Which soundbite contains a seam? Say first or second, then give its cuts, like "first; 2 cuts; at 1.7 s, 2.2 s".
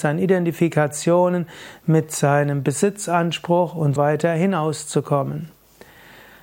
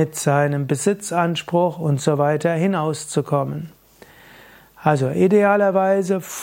first; 1 cut; at 4.0 s